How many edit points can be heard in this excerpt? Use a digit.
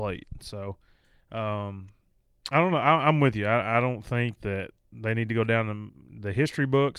0